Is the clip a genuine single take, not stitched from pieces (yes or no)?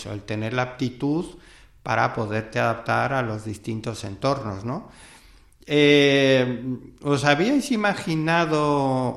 yes